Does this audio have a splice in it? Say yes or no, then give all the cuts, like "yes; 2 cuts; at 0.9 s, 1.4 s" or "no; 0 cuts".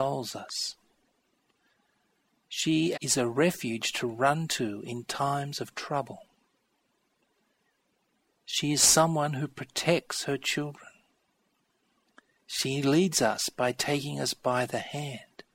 yes; 1 cut; at 2.9 s